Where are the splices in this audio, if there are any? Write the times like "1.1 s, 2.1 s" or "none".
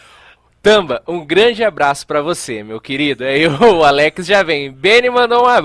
none